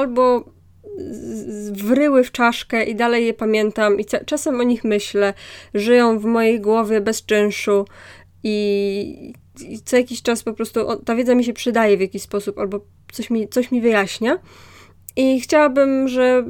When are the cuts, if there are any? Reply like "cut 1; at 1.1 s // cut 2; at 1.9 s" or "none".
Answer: none